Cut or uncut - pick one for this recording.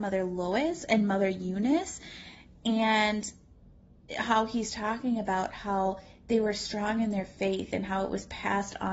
uncut